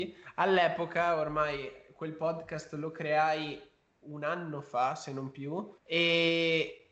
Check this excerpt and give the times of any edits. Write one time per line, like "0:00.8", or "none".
0:05.8